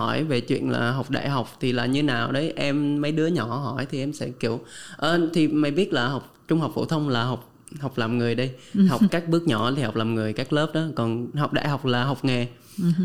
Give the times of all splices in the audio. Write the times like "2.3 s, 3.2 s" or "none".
9.1 s